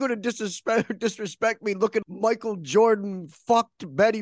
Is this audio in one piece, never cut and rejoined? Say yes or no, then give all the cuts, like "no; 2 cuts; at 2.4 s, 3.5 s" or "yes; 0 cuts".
no; 1 cut; at 2.0 s